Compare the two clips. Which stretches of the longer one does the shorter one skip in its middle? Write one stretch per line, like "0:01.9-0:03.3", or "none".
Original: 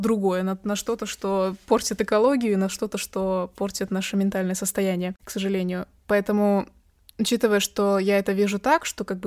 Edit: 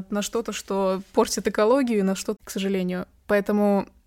0:02.9-0:05.2